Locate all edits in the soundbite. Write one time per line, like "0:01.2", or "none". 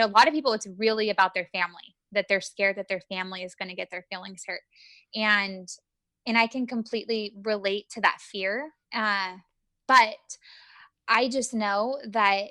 0:08.8

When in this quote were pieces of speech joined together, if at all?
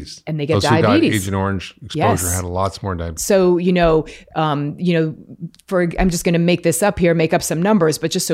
0:03.2

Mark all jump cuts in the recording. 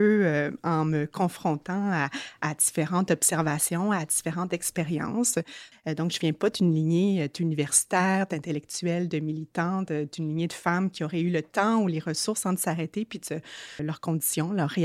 0:05.7
0:13.8

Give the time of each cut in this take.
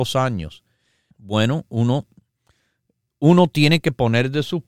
0:01.1

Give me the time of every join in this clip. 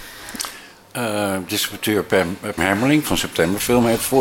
0:02.6

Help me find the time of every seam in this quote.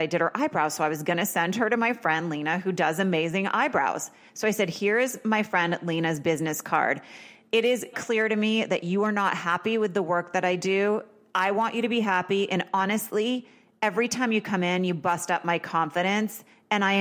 0:07.9

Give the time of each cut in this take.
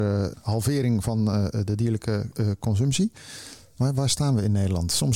0:03.8

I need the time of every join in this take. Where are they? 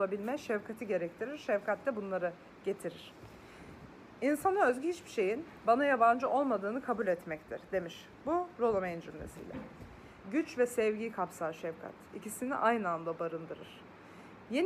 0:10.2

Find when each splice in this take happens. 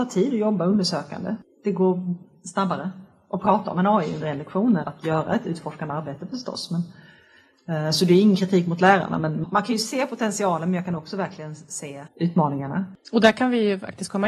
0:04.8
0:09.4

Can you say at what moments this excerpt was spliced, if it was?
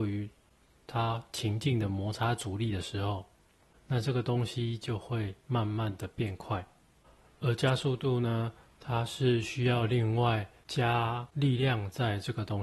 none

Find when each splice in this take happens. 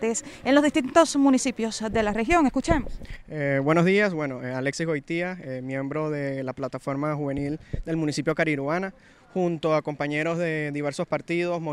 none

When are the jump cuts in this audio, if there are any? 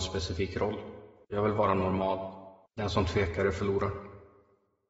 0:01.2
0:02.7

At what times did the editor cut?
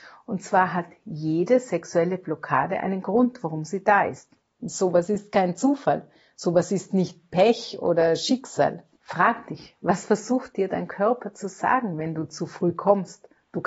none

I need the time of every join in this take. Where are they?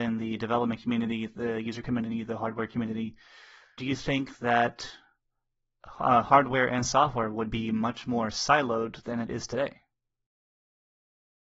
0:03.8

